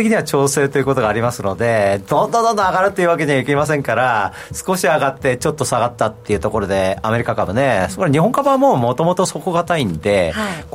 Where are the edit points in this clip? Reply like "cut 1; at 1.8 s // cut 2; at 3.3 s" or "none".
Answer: none